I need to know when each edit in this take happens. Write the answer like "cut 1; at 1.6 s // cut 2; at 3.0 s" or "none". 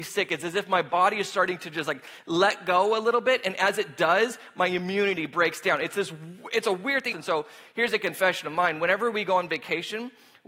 cut 1; at 7.1 s